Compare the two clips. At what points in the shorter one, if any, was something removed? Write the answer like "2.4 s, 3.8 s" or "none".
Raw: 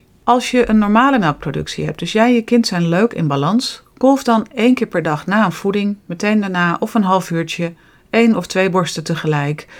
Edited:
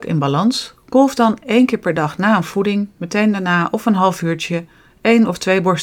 none